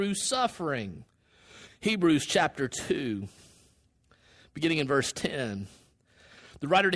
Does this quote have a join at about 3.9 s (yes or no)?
no